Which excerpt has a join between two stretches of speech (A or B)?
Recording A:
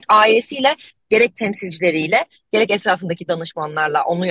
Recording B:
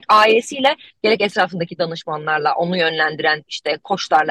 B